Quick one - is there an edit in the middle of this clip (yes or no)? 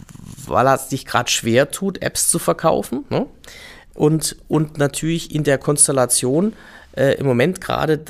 no